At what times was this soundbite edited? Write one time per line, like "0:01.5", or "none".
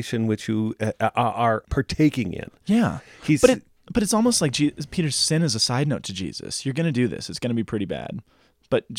0:01.6